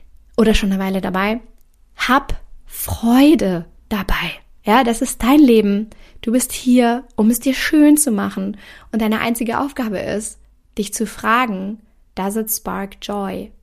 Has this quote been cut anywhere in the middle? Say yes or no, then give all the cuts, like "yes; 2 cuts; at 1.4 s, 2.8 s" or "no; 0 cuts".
no; 0 cuts